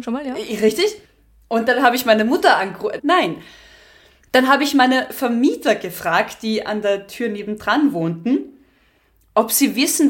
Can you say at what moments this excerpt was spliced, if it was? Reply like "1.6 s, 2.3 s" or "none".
3.0 s